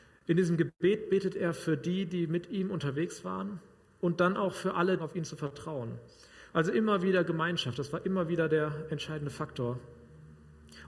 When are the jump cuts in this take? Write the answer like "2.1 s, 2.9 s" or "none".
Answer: 5.0 s, 6.5 s